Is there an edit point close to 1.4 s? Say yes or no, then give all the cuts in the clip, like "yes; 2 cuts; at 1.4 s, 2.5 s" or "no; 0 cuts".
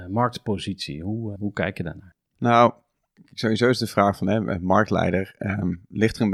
yes; 1 cut; at 1.4 s